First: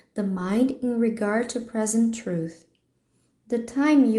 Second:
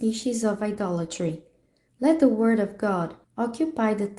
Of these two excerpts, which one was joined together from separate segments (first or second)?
second